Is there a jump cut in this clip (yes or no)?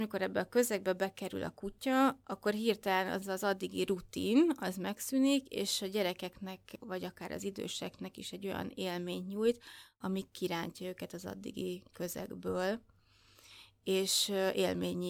no